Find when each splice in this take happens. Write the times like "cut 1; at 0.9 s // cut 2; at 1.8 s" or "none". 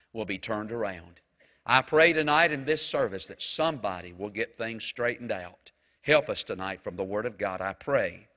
cut 1; at 6.0 s